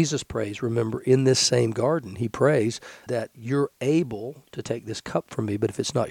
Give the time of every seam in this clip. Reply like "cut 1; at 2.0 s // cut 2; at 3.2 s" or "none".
cut 1; at 3.1 s